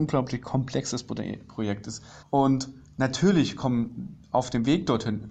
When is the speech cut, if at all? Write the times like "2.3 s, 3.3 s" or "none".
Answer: 2.2 s